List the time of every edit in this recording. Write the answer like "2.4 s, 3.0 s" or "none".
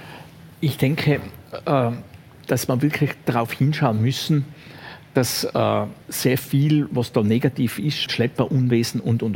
6.0 s, 8.1 s